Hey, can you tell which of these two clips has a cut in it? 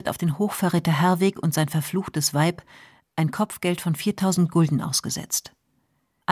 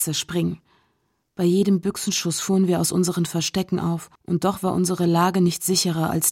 second; 1 cut; at 4.2 s

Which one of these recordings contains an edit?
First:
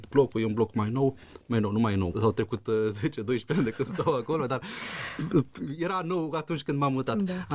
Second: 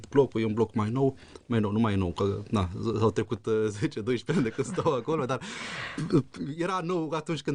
first; 1 cut; at 2.1 s

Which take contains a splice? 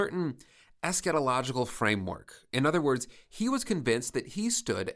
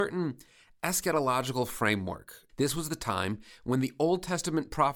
second; 1 cut; at 2.5 s

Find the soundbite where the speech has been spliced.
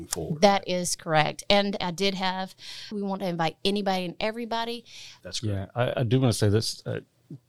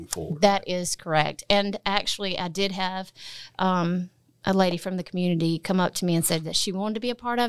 first; 3 cuts; at 1.8 s, 2.9 s, 5.2 s

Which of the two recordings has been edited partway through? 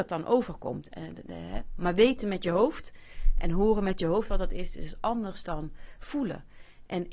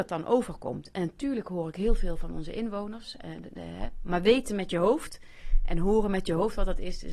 first; 1 cut; at 0.9 s

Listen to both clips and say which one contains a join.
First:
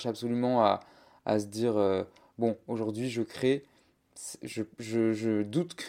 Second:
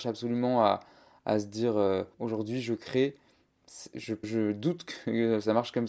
second; 2 cuts; at 2.1 s, 4.2 s

